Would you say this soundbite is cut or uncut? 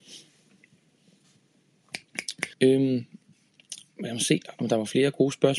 cut